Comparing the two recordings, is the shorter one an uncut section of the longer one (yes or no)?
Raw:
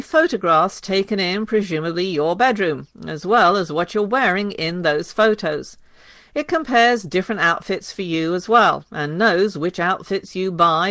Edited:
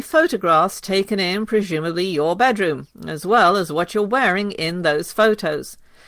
yes